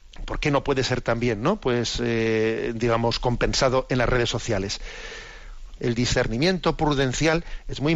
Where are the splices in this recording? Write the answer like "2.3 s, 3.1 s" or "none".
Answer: 5.8 s